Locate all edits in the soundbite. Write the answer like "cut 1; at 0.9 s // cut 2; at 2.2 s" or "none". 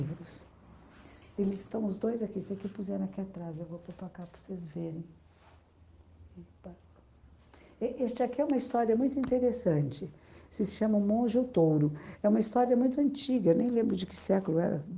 none